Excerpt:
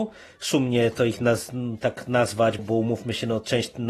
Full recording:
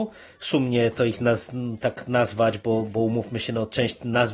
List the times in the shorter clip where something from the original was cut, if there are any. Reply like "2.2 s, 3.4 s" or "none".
2.6 s